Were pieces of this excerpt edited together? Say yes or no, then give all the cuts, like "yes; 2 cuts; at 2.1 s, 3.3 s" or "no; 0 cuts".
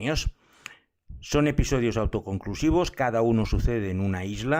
no; 0 cuts